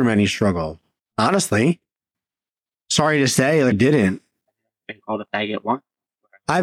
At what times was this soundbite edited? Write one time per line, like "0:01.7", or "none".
0:03.7